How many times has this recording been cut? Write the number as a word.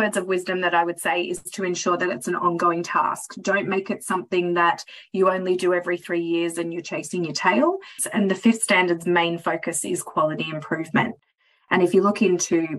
one